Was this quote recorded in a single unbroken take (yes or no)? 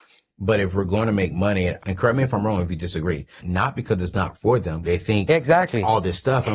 no